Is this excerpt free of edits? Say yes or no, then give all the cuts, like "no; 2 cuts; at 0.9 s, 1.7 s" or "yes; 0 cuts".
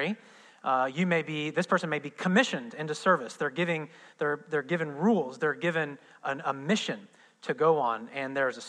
yes; 0 cuts